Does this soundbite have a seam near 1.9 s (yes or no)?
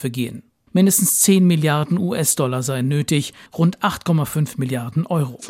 no